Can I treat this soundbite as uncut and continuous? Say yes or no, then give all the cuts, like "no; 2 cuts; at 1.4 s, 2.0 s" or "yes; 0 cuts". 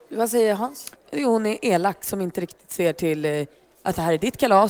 no; 1 cut; at 1.0 s